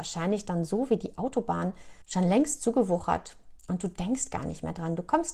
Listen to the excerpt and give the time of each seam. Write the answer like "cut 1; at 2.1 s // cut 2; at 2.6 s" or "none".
cut 1; at 2.0 s